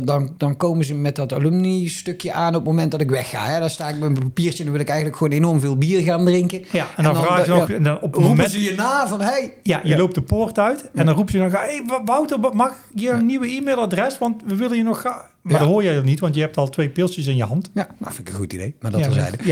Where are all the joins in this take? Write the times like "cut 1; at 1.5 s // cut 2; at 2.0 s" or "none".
cut 1; at 7.7 s